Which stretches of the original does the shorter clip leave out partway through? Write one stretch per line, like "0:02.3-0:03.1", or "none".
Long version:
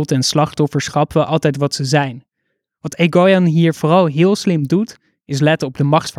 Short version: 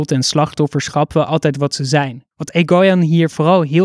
0:02.3-0:02.8